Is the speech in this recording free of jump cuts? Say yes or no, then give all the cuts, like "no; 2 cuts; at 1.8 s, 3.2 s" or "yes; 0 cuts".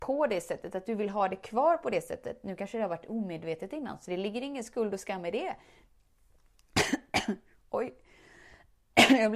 yes; 0 cuts